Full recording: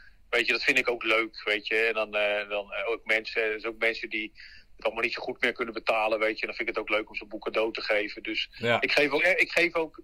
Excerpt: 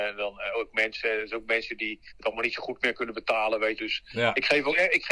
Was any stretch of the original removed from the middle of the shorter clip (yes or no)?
yes